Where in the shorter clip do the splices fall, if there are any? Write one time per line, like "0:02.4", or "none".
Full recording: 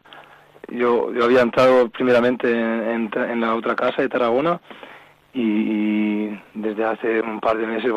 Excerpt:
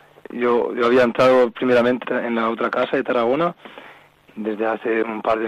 0:02.0
0:04.3